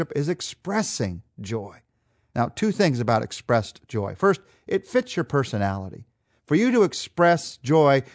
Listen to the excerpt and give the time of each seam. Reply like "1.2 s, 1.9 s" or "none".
none